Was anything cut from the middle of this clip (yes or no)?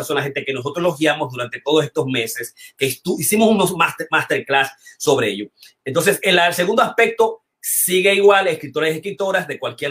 no